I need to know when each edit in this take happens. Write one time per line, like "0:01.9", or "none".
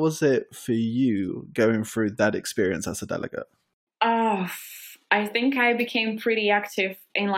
none